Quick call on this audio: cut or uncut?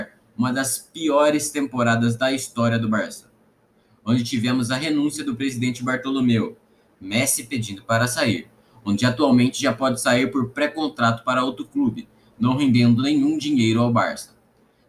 uncut